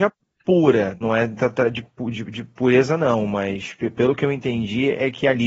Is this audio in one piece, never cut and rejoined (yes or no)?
no